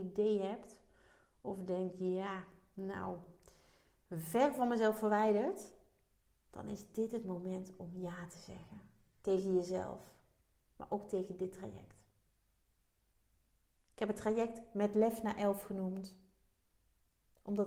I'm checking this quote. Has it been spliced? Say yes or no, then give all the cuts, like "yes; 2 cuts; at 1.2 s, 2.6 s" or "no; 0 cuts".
no; 0 cuts